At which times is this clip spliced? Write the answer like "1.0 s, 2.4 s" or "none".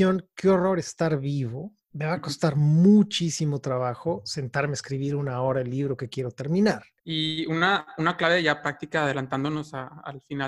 7.0 s